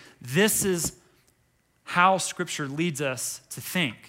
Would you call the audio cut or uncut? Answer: uncut